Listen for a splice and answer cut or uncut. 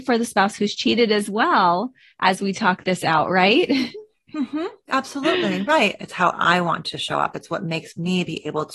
cut